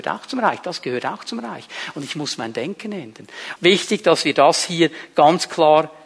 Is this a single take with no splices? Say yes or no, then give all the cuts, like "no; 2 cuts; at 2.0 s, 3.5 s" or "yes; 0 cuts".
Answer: no; 1 cut; at 3.6 s